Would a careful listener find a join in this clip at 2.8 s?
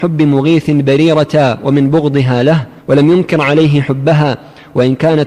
yes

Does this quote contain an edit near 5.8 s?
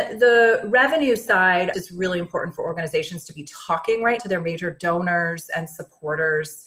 no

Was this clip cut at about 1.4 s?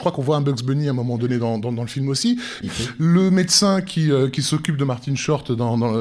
no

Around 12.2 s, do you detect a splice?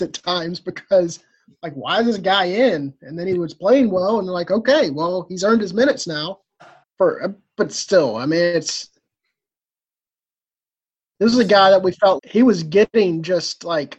yes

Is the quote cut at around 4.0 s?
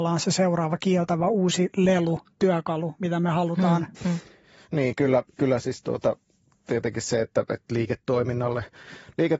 yes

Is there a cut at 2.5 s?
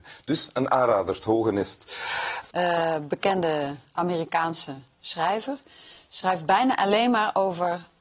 yes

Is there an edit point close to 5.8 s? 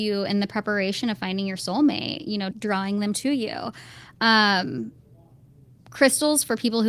no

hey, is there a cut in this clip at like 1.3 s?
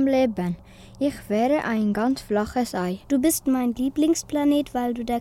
no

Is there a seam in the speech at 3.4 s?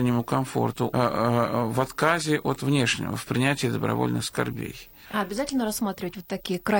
no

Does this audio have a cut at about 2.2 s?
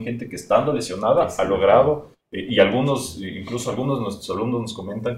yes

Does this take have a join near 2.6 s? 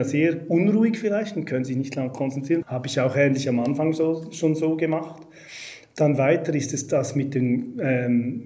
yes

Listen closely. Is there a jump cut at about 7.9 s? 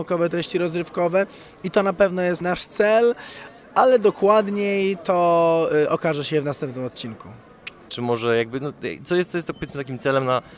yes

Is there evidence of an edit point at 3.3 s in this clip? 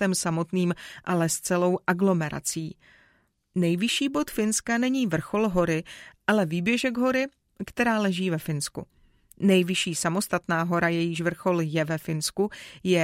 no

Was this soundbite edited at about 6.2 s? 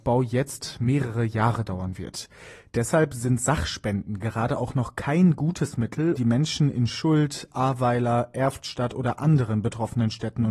yes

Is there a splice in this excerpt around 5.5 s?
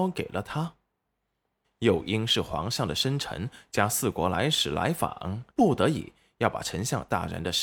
yes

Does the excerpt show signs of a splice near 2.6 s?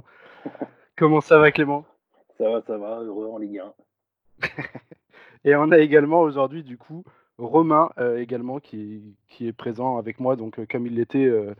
no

